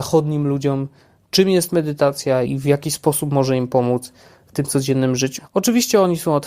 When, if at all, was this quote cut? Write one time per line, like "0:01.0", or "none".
0:02.5
0:05.4